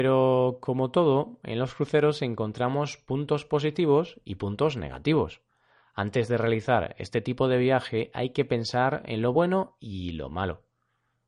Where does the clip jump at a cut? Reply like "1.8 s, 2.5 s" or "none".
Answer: none